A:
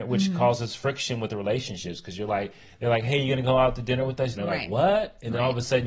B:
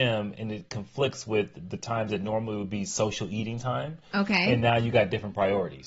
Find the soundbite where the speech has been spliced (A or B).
A